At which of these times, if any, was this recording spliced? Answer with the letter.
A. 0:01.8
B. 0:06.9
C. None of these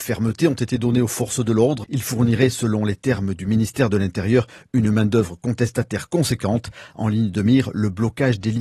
A